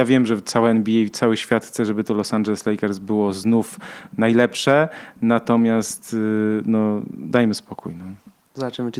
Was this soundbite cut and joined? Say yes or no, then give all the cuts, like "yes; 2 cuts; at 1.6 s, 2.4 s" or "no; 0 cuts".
no; 0 cuts